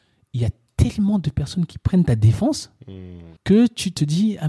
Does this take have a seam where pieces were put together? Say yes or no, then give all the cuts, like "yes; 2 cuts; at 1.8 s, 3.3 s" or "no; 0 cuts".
yes; 1 cut; at 3.4 s